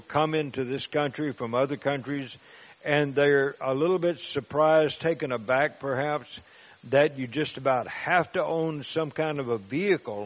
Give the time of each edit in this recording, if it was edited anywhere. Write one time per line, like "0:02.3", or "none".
none